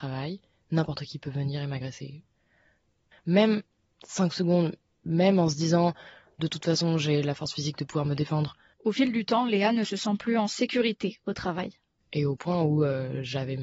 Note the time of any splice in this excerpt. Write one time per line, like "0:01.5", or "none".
0:03.1
0:08.7